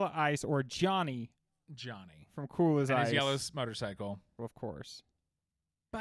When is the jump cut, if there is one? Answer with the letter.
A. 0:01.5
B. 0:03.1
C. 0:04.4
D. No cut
C